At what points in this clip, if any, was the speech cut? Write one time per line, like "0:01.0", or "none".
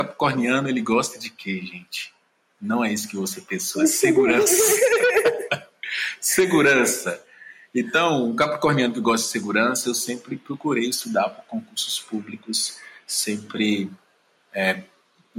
none